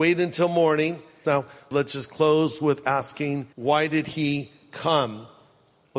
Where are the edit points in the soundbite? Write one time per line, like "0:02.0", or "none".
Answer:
0:01.2
0:03.5

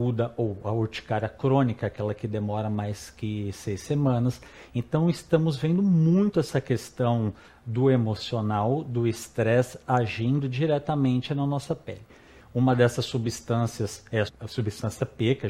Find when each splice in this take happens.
0:12.4
0:14.3

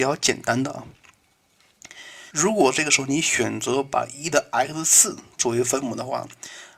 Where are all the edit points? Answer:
0:02.3

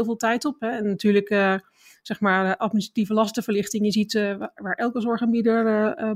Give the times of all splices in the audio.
0:04.6

